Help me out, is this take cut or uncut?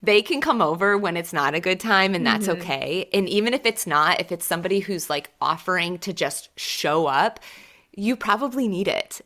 uncut